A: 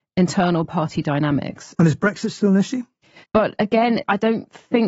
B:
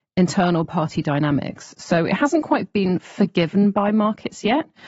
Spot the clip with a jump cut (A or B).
A